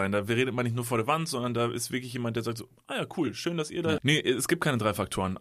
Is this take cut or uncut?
cut